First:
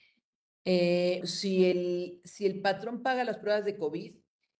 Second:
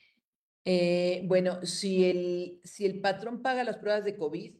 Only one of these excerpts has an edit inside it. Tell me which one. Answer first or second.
first